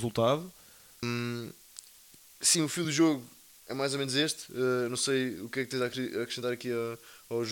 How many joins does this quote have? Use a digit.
1